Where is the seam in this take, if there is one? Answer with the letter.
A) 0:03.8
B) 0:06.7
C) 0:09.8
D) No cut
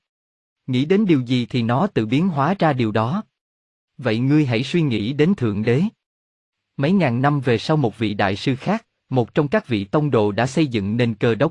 D